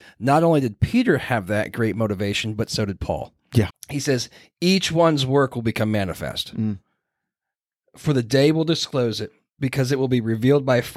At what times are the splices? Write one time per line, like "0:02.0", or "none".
0:03.7